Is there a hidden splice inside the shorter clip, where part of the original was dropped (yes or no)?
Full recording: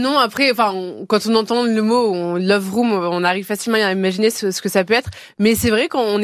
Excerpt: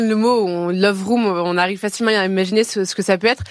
no